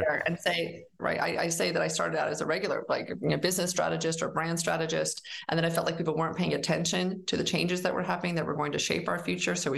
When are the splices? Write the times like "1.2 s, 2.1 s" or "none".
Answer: 1.0 s